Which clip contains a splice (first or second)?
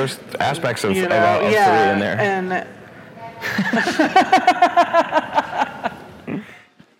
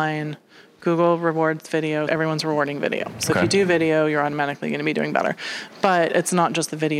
second